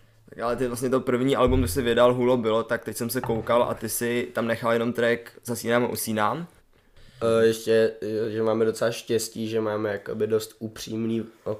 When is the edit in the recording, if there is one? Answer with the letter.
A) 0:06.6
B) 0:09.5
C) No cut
A